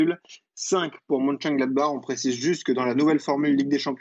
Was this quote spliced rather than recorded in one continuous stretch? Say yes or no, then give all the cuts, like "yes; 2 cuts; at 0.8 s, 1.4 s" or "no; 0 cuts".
no; 0 cuts